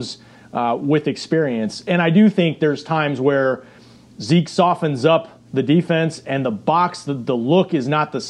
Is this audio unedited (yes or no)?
no